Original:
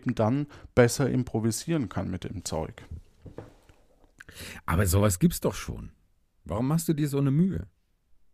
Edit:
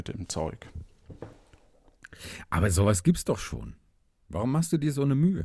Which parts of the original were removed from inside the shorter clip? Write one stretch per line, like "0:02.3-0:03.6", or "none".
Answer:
none